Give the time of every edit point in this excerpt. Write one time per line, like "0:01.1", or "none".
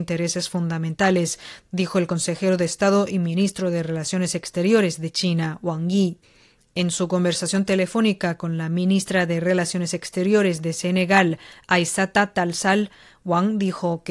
none